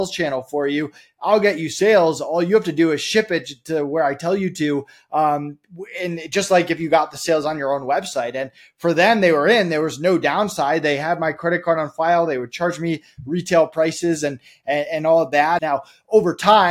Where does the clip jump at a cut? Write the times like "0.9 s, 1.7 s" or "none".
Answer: 15.6 s

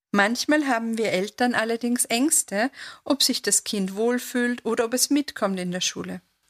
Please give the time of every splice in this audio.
none

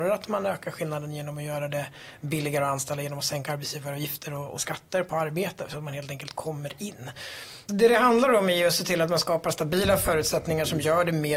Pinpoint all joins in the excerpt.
4.6 s, 7.7 s

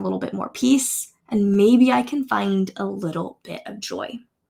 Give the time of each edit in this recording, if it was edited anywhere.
1.2 s

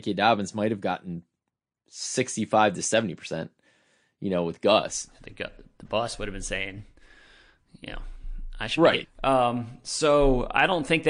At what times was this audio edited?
9.0 s

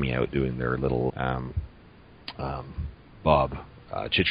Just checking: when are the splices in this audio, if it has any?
1.1 s

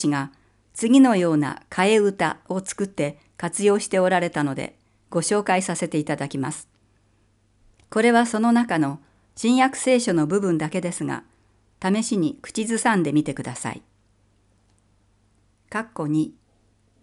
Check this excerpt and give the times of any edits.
7.7 s, 15.5 s

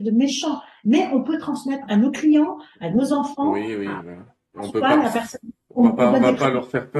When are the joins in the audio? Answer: 1.9 s

